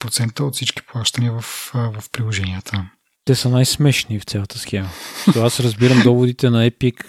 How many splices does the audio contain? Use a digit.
1